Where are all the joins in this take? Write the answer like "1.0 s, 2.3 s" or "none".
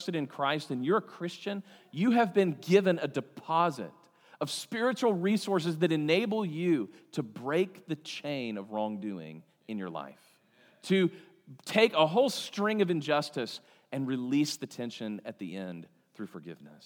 none

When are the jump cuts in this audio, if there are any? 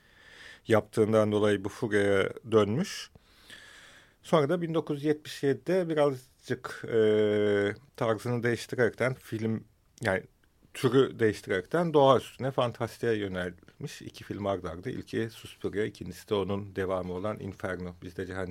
9.1 s

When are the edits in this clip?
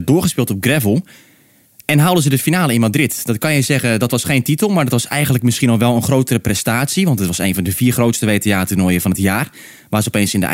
none

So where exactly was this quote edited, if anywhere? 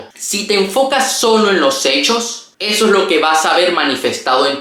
none

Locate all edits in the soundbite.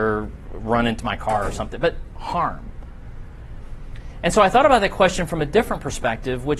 none

